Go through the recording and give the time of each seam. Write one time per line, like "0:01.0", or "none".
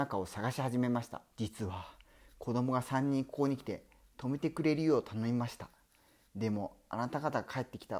0:01.3